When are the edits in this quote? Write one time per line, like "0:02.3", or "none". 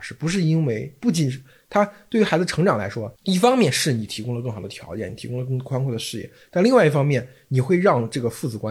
0:03.2